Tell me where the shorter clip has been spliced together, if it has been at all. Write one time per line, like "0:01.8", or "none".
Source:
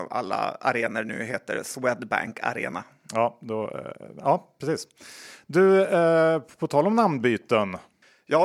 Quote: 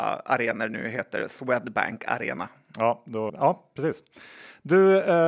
0:03.3